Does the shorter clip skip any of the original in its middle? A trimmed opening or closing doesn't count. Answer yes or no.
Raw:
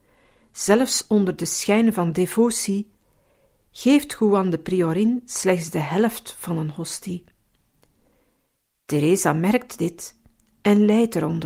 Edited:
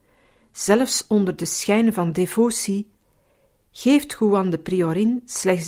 no